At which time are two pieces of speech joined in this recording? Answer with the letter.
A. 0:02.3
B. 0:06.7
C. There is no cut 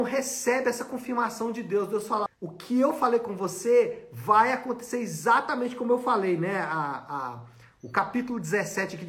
A